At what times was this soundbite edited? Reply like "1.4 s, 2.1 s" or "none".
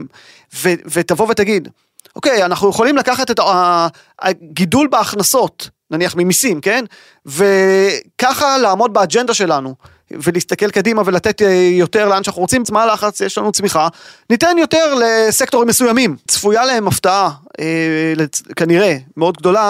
12.6 s, 16.3 s